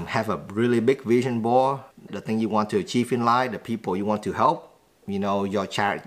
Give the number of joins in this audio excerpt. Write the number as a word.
one